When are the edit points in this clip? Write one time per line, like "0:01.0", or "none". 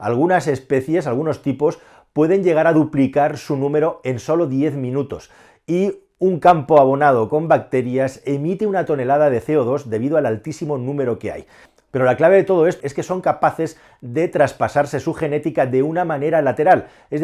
0:12.8